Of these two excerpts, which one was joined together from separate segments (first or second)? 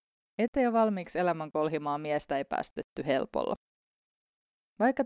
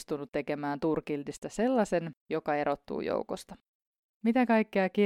second